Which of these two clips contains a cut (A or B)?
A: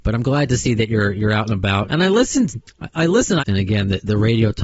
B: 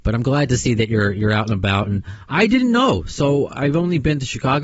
A